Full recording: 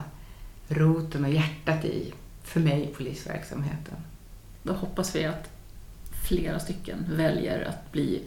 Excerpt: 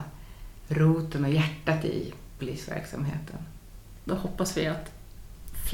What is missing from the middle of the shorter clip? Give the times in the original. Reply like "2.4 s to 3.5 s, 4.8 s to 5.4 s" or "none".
2.4 s to 3.0 s